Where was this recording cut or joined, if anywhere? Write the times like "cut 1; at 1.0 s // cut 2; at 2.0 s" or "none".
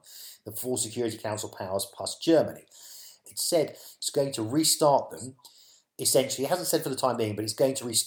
cut 1; at 3.2 s

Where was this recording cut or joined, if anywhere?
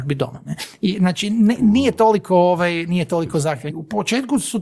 cut 1; at 3.7 s

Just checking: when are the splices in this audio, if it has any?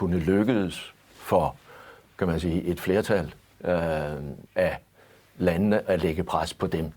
cut 1; at 2.1 s // cut 2; at 4.5 s

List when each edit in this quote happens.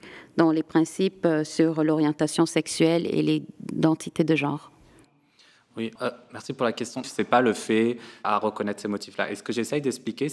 cut 1; at 6.0 s // cut 2; at 7.0 s // cut 3; at 8.2 s

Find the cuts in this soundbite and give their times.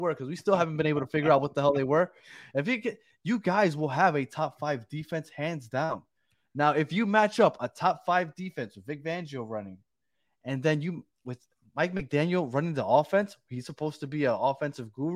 none

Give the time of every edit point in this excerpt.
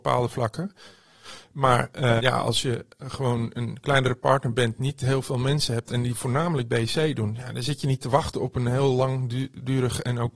cut 1; at 2.2 s

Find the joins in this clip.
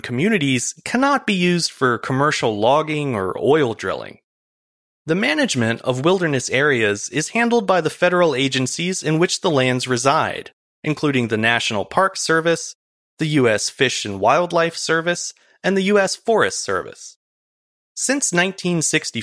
cut 1; at 13.0 s

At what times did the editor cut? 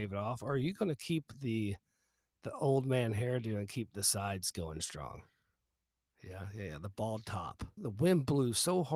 cut 1; at 6.1 s // cut 2; at 7.8 s

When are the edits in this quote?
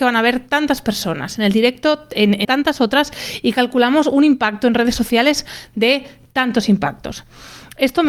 cut 1; at 2.4 s

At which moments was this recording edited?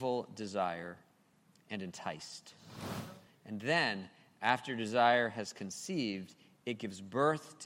none

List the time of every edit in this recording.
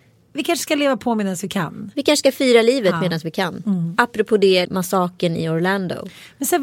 cut 1; at 4.6 s

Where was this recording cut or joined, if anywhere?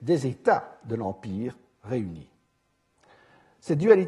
none

